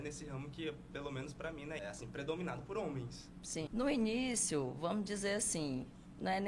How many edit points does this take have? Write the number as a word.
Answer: two